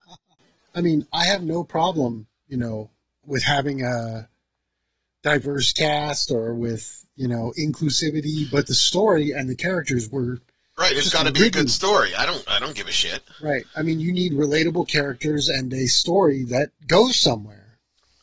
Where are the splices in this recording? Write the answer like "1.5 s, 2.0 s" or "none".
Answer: none